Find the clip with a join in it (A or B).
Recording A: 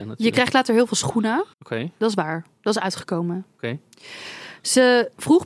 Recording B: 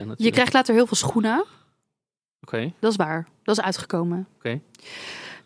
A